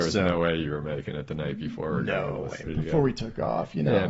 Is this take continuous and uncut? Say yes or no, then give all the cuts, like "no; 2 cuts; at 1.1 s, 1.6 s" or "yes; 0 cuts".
no; 1 cut; at 2.6 s